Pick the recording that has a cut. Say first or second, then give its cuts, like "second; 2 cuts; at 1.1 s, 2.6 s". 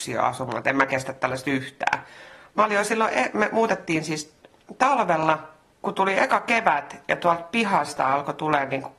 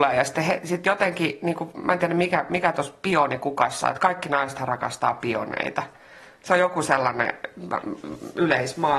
first; 1 cut; at 2.5 s